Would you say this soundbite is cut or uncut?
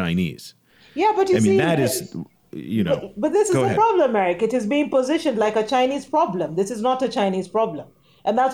uncut